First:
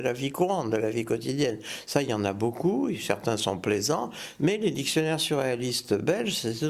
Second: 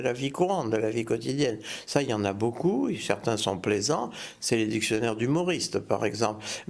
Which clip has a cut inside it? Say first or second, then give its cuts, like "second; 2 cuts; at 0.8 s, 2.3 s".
first; 1 cut; at 4.4 s